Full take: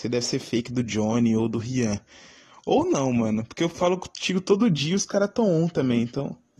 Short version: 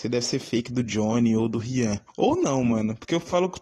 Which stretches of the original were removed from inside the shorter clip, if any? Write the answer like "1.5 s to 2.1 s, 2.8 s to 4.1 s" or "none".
2.1 s to 2.6 s